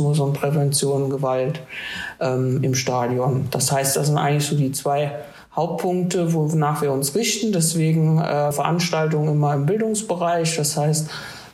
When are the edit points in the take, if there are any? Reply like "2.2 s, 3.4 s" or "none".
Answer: 8.5 s